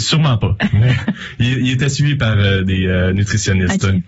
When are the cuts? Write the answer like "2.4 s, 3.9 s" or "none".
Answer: none